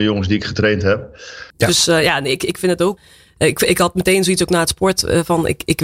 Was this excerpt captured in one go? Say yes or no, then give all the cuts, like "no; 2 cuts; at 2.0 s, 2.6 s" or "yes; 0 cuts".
no; 1 cut; at 1.5 s